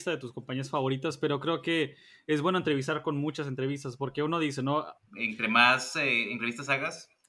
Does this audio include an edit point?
yes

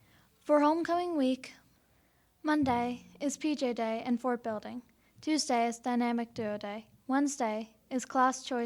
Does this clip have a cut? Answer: no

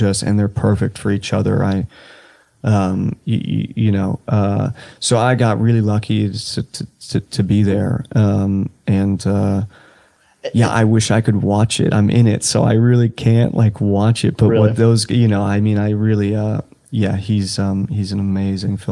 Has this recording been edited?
no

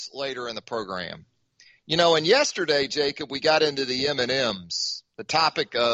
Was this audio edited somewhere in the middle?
no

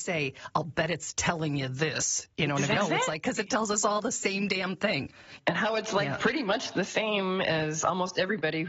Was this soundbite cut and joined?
yes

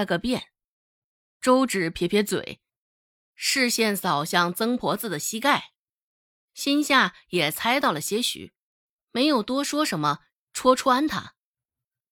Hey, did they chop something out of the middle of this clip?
yes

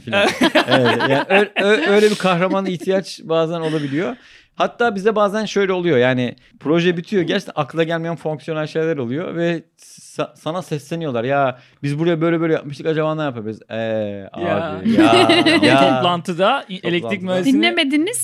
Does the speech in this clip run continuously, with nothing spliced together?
yes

